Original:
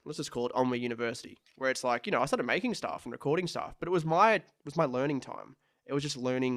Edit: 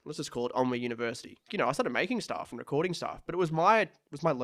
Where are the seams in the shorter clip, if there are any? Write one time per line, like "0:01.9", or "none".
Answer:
0:01.5